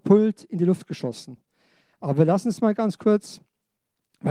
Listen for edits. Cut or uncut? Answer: cut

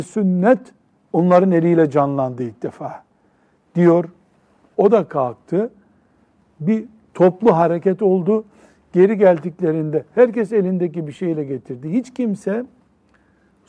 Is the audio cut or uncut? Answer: cut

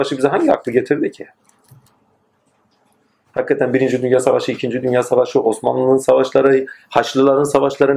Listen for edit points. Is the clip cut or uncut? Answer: cut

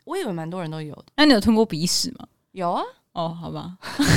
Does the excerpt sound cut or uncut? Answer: cut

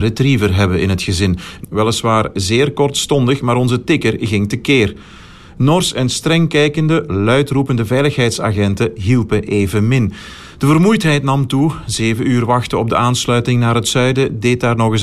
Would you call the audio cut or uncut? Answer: cut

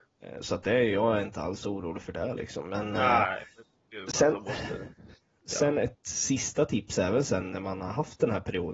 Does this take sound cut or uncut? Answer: uncut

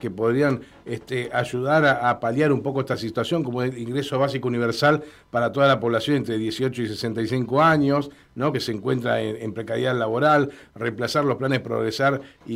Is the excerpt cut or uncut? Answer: uncut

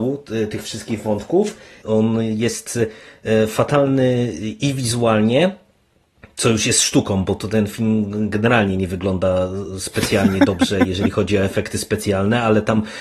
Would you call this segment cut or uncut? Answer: cut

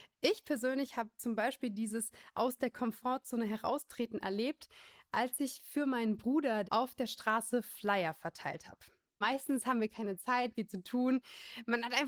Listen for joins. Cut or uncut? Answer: cut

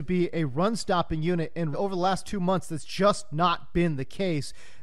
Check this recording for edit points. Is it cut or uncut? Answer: cut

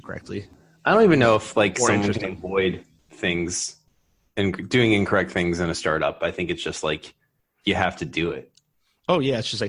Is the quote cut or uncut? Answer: uncut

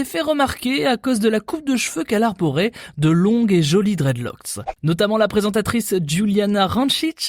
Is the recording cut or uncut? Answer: cut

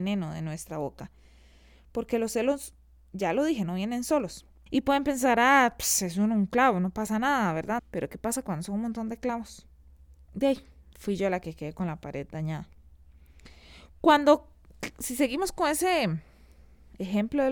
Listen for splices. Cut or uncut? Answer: cut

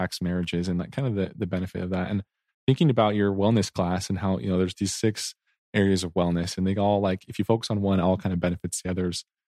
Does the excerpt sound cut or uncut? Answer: uncut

